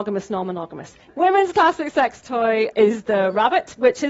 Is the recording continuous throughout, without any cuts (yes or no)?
no